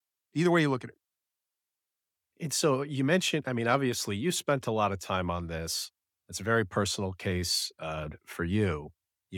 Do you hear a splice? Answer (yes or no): no